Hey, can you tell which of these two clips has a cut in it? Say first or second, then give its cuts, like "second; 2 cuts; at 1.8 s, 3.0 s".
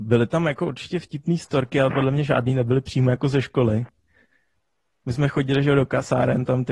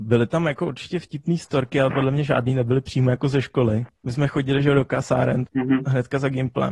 second; 2 cuts; at 3.9 s, 5.5 s